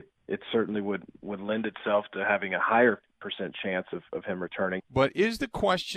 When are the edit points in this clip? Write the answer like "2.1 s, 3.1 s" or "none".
4.8 s